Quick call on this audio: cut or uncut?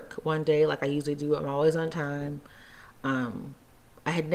uncut